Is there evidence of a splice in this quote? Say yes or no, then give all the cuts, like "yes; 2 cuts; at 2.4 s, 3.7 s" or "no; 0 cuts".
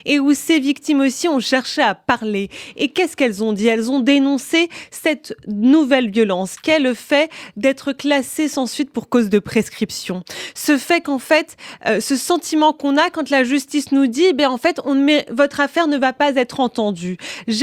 no; 0 cuts